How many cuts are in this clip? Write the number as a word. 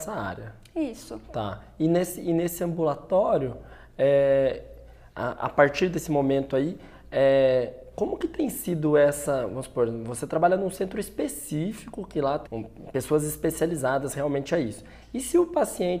one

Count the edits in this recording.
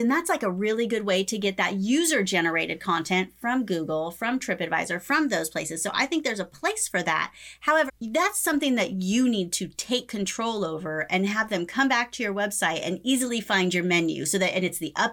one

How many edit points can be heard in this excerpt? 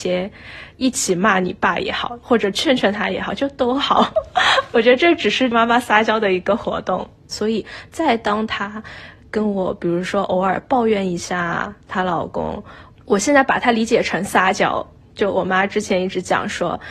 one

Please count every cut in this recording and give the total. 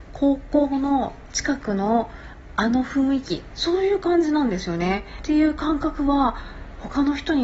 one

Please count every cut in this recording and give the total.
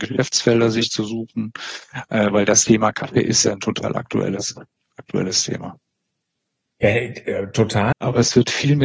one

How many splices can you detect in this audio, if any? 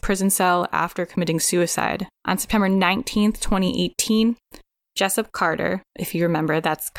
one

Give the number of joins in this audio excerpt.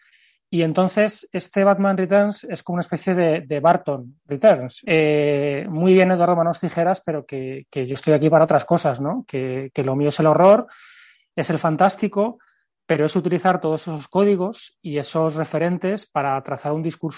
one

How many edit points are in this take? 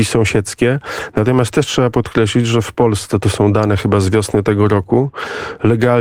zero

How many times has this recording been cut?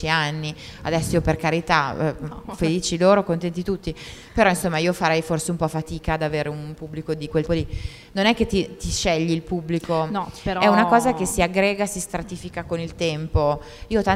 one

